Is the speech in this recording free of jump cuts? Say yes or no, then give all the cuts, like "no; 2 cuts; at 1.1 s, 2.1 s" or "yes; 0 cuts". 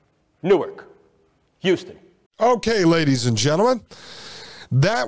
no; 1 cut; at 2.3 s